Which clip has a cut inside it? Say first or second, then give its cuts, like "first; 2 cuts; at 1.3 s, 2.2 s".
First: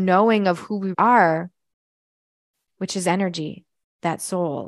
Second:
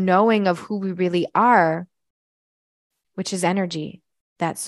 first; 1 cut; at 0.9 s